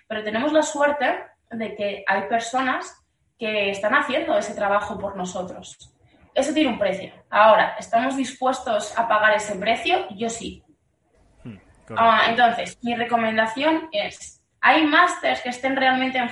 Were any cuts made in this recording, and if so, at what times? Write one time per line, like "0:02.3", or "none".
0:07.2